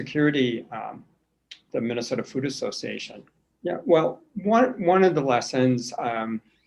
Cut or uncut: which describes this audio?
cut